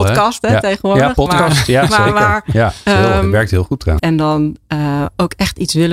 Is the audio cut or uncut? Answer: cut